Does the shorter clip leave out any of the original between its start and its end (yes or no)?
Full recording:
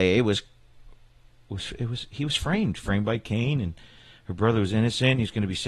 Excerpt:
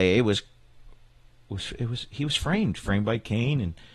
no